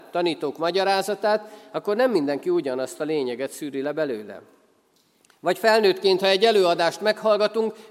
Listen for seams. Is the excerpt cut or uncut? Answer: uncut